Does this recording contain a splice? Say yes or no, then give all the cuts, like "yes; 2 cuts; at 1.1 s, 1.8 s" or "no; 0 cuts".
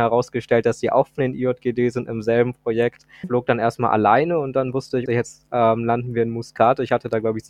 yes; 2 cuts; at 3.2 s, 5.1 s